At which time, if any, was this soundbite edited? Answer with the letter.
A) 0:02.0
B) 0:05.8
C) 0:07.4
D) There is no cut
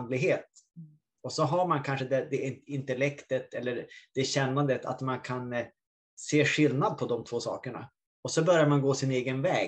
D